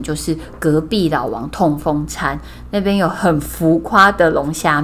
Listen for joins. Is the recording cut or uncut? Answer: uncut